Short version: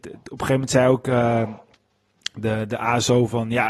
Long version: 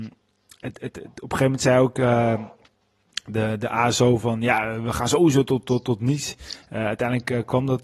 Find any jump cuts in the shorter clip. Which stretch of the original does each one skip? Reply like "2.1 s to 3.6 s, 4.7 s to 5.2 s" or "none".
none